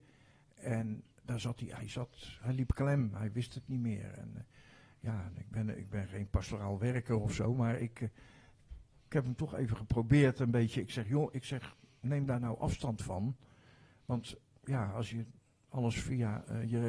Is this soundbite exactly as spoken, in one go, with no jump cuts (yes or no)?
yes